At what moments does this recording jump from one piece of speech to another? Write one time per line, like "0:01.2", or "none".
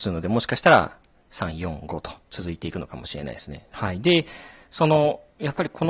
0:03.7

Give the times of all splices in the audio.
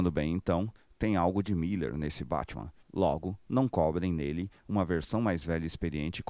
0:02.8

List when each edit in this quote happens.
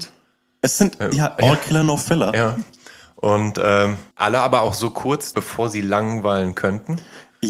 0:04.1
0:05.3

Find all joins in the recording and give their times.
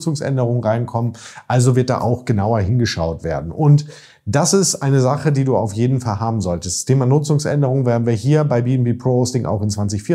none

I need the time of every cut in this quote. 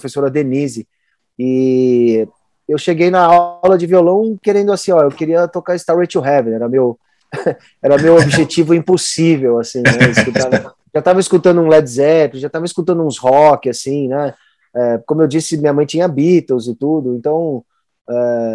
none

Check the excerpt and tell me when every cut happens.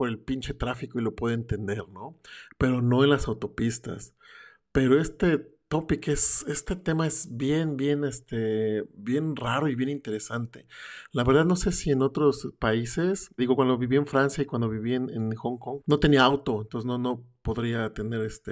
0:13.4
0:15.8

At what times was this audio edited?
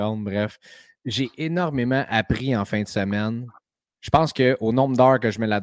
0:01.0
0:03.9

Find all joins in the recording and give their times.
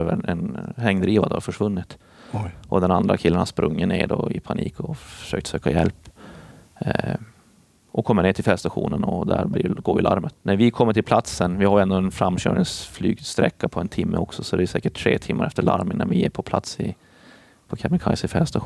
0:10.3

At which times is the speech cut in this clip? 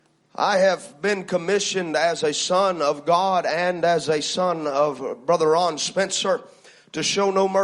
none

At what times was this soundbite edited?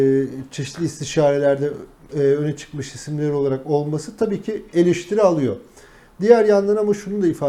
0:02.1

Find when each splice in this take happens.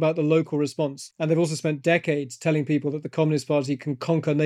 none

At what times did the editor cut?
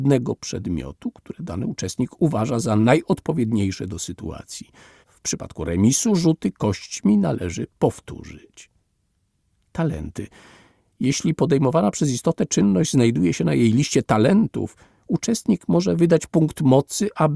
0:05.0

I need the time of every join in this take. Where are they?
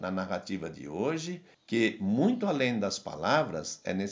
0:01.5

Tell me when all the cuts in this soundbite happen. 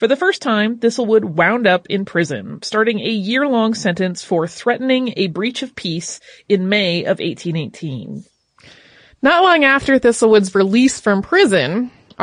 none

